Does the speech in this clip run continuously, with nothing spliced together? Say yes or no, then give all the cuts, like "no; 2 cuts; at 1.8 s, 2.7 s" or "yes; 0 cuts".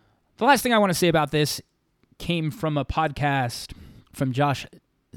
no; 1 cut; at 4.1 s